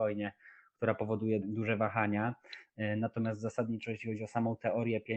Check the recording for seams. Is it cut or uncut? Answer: cut